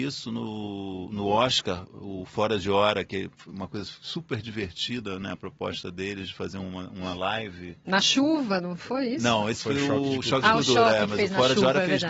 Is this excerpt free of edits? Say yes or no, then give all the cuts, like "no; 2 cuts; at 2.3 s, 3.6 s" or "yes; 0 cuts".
yes; 0 cuts